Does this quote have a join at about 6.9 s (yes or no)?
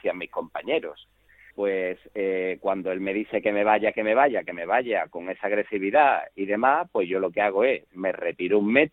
no